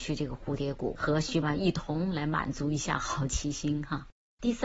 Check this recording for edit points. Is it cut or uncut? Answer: cut